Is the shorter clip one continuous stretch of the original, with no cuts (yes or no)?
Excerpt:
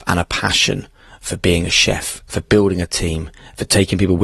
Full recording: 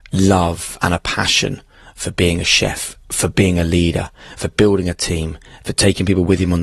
no